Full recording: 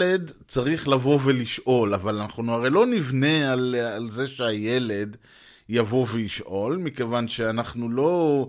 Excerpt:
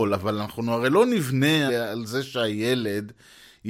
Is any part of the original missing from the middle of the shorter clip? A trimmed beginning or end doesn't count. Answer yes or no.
yes